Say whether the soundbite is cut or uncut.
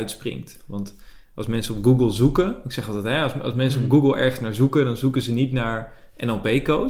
uncut